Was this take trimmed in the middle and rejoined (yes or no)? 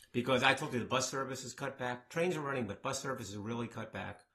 no